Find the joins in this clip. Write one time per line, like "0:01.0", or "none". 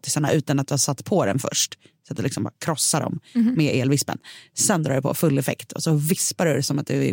none